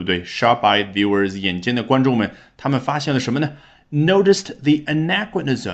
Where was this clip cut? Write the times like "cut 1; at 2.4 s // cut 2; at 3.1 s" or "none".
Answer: none